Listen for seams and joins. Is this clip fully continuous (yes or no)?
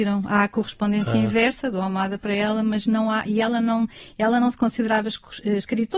yes